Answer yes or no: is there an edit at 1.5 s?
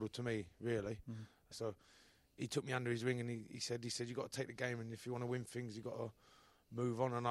yes